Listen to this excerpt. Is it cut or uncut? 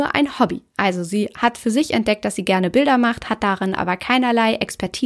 uncut